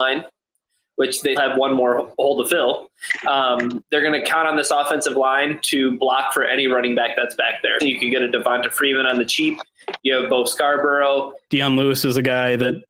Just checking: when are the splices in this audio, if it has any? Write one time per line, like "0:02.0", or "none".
0:01.4
0:07.8
0:11.5